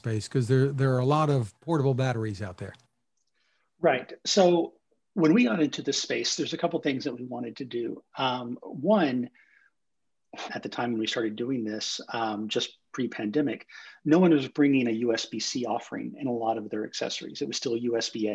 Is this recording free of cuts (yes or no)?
no